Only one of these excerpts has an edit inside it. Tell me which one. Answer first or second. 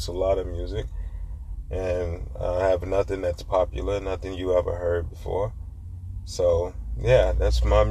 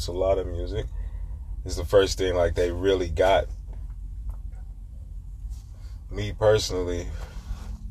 second